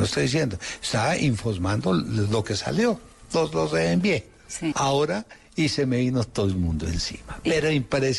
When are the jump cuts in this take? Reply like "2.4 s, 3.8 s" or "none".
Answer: 4.7 s